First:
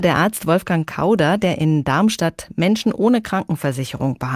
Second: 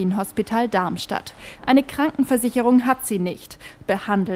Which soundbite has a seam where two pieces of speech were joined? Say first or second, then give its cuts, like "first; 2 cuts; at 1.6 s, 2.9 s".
second; 1 cut; at 1.6 s